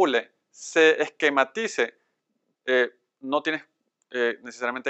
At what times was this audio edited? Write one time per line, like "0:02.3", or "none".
0:02.5